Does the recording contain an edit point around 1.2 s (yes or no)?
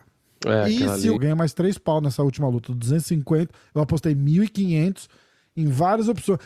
yes